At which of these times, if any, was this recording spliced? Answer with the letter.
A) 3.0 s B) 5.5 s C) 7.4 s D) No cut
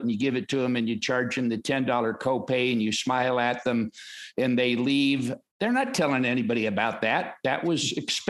B